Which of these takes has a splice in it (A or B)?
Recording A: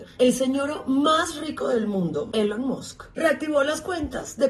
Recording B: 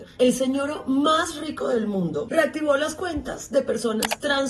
B